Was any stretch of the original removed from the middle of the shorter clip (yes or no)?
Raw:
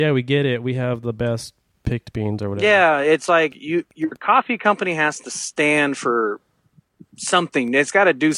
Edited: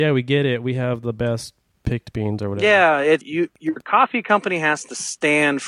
yes